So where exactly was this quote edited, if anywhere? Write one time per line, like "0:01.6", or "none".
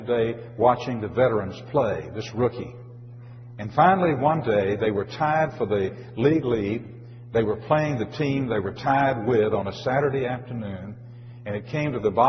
none